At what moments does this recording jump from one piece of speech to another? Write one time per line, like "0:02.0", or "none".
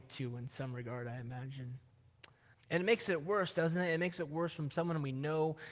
0:02.5